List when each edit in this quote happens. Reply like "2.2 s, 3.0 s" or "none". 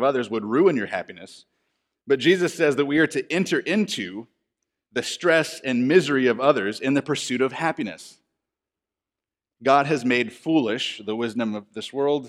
none